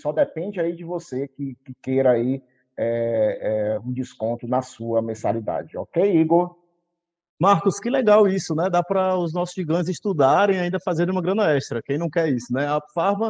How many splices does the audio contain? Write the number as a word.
zero